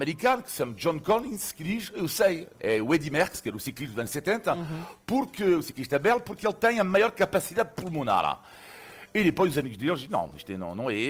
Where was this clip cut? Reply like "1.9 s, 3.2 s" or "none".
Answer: none